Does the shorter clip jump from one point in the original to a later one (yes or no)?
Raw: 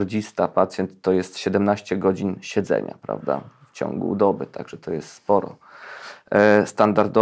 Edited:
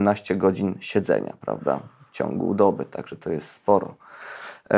no